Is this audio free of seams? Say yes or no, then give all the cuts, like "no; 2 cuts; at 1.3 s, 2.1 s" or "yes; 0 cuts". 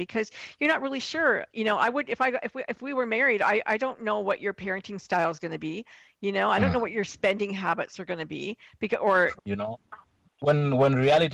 no; 1 cut; at 9.4 s